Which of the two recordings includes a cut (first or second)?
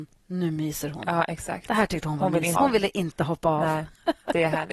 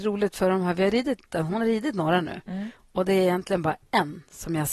first